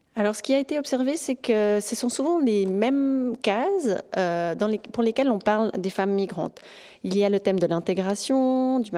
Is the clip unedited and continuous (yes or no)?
yes